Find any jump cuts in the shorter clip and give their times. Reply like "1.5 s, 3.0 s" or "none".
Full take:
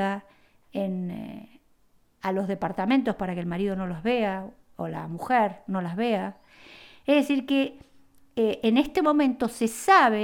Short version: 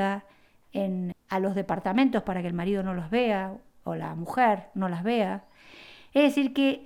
1.1 s

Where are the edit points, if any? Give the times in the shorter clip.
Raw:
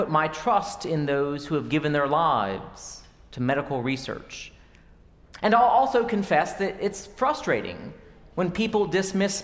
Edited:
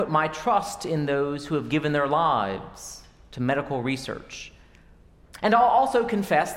none

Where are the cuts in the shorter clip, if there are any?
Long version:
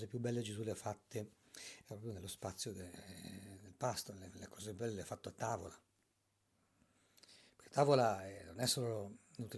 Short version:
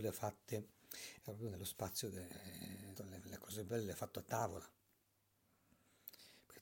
3.0 s

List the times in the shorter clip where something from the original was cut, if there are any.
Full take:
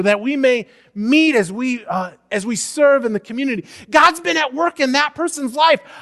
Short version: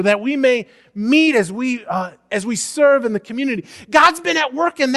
none

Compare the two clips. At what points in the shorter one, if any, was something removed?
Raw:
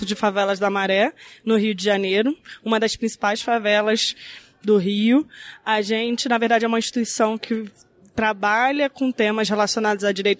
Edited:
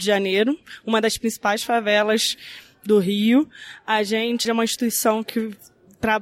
4.4 s

